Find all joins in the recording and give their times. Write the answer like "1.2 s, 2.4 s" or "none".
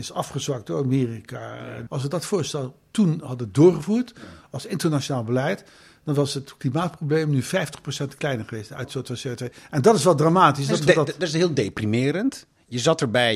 1.9 s